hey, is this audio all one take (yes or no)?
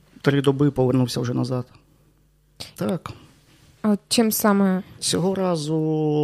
no